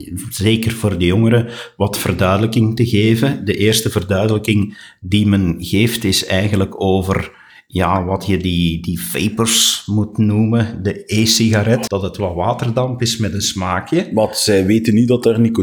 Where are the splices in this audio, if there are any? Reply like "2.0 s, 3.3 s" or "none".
11.9 s